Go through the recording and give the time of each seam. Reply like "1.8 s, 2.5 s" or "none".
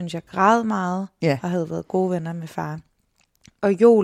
1.2 s